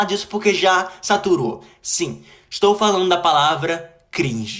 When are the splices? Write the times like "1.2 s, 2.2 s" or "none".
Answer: none

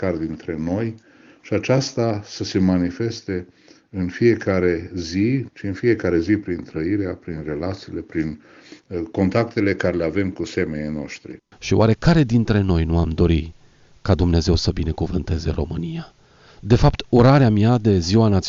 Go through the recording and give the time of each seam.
5.5 s, 11.5 s

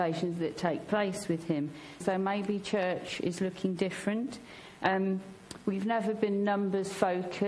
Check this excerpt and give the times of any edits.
2.0 s

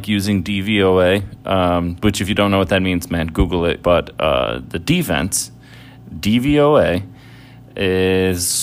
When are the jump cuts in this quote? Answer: 3.8 s

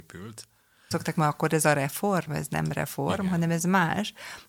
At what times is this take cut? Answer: 0.9 s, 2.3 s

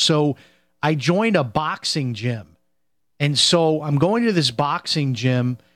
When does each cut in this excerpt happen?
none

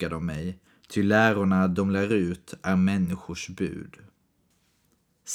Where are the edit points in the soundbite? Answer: none

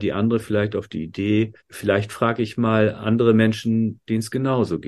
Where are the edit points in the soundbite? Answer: 1.6 s

